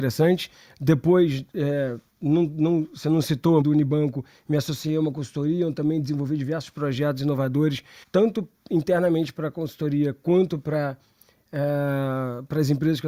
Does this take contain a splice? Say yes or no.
yes